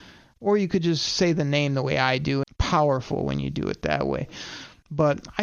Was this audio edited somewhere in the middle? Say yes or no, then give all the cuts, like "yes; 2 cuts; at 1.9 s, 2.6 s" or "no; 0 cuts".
yes; 1 cut; at 2.4 s